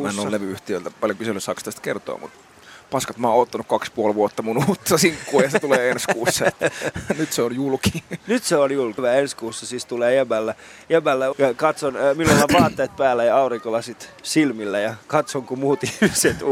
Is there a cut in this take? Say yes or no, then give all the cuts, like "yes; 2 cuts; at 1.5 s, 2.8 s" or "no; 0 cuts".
yes; 2 cuts; at 9.0 s, 11.3 s